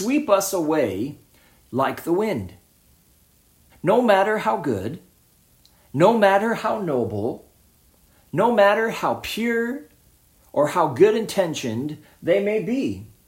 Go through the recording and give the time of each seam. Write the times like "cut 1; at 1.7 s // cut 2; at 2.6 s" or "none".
cut 1; at 3.7 s